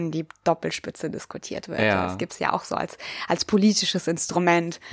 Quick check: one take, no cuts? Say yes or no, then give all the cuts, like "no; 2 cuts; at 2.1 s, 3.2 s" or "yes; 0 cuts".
yes; 0 cuts